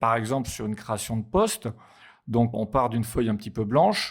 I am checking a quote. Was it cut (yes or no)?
no